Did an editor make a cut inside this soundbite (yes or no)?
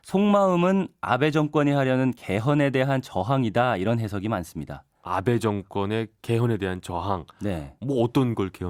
no